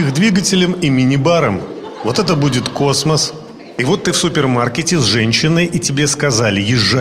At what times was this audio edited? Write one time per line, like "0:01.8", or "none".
none